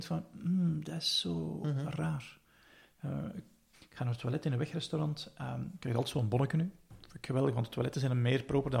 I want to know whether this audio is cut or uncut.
cut